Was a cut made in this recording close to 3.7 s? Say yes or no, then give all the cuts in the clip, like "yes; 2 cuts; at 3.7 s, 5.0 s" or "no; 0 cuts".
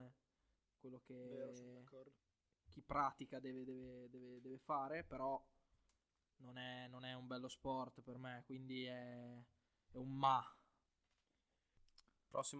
no; 0 cuts